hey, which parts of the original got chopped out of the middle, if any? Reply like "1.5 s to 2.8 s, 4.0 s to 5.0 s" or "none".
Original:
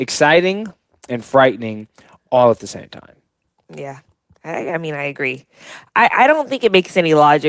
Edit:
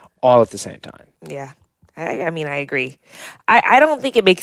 3.2 s to 3.6 s